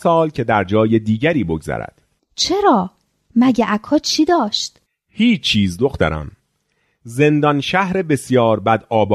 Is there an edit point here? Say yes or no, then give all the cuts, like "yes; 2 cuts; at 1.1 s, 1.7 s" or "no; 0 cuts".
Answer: no; 0 cuts